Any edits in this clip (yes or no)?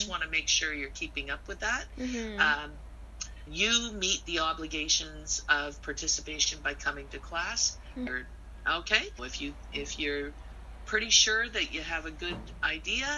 yes